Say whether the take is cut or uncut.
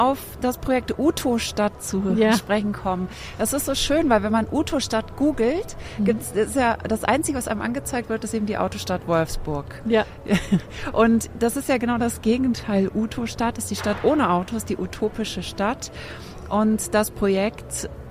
uncut